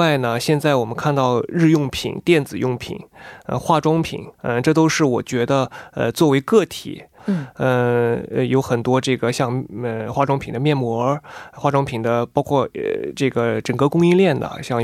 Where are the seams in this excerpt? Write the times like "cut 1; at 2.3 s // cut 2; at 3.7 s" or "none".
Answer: cut 1; at 4.3 s // cut 2; at 7.2 s